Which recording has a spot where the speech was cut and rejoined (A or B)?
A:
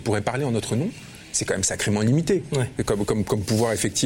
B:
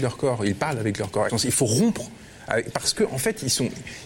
B